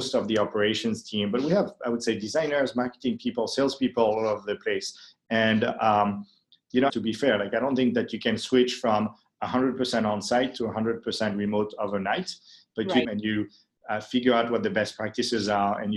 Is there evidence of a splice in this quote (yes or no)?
yes